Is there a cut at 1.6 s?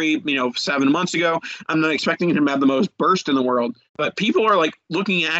no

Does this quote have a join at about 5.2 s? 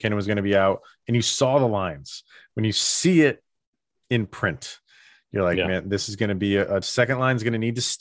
no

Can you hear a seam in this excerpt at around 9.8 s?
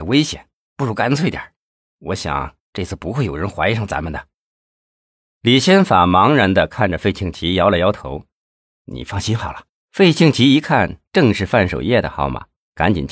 yes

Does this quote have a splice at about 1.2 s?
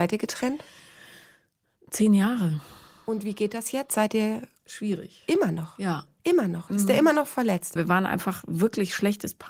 no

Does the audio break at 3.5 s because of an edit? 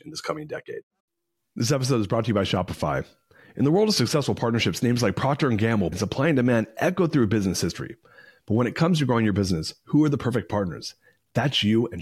no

